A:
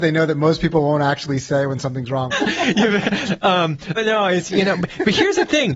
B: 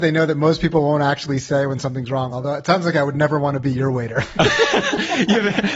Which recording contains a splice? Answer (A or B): A